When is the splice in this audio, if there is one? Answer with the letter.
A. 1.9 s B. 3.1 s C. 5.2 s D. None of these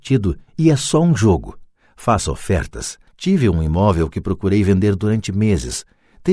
B